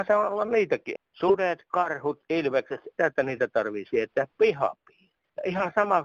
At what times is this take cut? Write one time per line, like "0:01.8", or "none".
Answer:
0:01.0
0:03.0